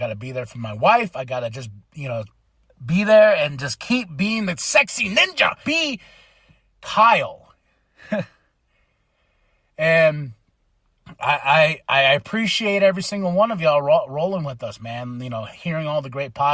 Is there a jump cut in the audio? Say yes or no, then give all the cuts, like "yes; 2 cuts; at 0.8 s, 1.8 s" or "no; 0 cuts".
yes; 1 cut; at 5.6 s